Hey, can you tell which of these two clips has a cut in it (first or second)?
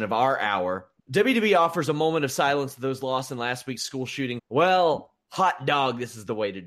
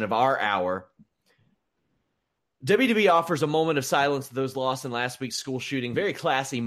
first